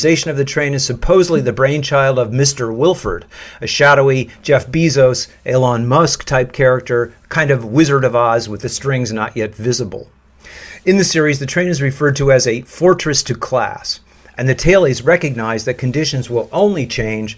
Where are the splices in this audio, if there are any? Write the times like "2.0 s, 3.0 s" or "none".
none